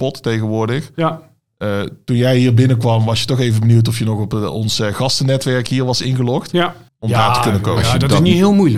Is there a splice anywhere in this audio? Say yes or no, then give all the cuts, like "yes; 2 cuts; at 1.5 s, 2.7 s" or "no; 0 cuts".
yes; 1 cut; at 6.9 s